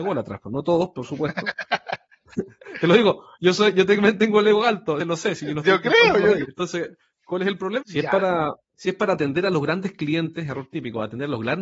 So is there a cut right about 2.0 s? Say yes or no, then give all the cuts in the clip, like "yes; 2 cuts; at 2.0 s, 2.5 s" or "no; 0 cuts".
no; 3 cuts; at 5.0 s, 6.4 s, 7.8 s